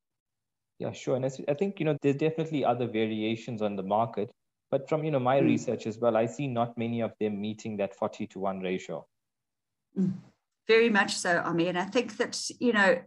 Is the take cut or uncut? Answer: cut